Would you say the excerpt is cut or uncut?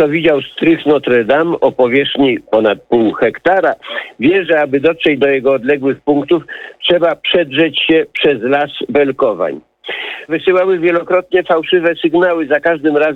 cut